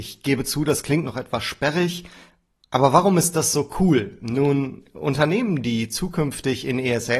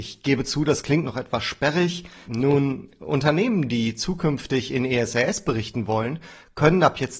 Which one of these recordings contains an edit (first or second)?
second